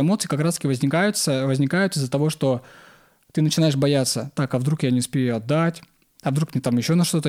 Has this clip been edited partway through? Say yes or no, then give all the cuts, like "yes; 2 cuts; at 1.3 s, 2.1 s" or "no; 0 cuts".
no; 0 cuts